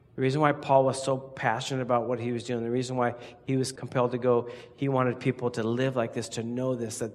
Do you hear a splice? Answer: no; 0 cuts

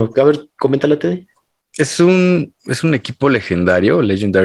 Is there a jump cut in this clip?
no; 0 cuts

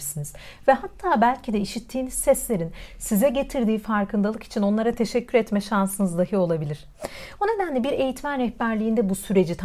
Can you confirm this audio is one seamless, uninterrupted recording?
no; 1 cut; at 7.4 s

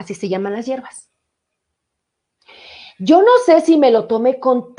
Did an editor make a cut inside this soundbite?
no; 0 cuts

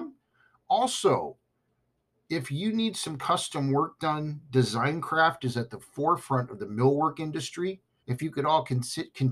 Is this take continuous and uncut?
no; 1 cut; at 8.0 s

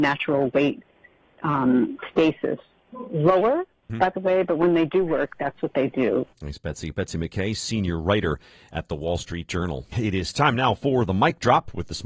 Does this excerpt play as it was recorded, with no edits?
no; 1 cut; at 3.9 s

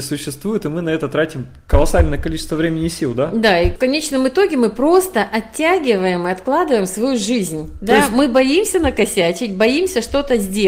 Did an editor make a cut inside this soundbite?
no; 0 cuts

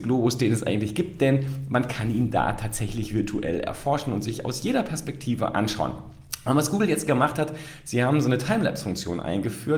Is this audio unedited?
yes; 0 cuts

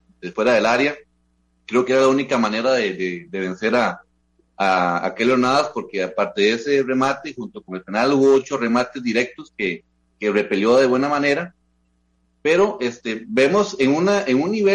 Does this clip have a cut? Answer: no; 0 cuts

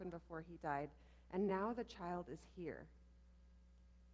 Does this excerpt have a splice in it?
no; 0 cuts

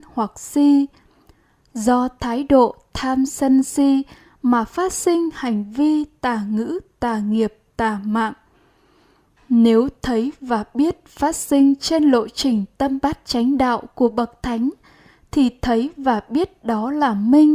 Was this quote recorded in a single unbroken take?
yes; 0 cuts

